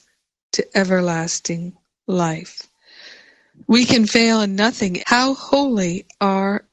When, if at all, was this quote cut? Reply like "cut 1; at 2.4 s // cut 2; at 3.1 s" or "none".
cut 1; at 3.5 s // cut 2; at 5.0 s